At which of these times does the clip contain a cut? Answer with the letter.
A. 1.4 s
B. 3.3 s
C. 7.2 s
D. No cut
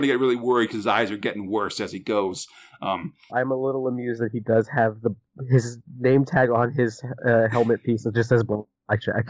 B